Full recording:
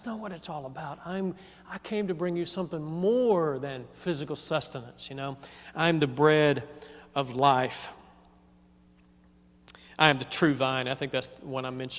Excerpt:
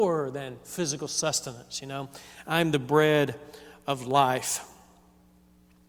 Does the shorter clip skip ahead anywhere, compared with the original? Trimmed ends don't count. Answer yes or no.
no